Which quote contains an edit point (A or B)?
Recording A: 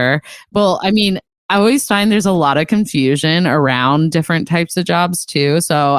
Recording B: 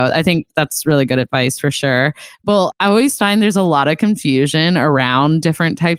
B